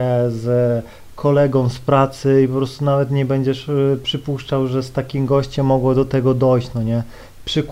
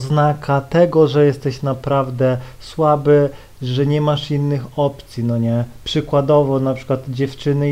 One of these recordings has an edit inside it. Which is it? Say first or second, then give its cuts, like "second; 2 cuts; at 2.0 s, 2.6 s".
second; 1 cut; at 5.8 s